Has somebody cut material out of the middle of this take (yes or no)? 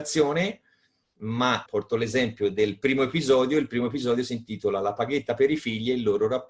yes